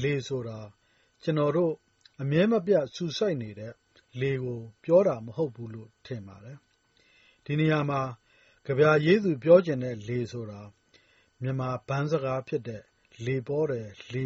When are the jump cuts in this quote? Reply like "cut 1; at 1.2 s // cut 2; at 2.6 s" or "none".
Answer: none